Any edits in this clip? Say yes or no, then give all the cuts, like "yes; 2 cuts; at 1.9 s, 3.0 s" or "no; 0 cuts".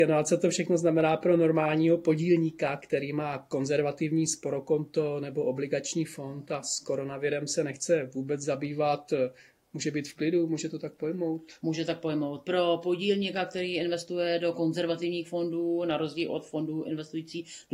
no; 0 cuts